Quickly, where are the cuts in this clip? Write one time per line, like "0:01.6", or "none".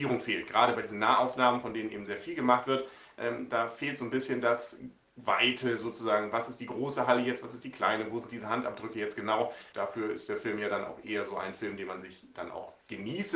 0:09.7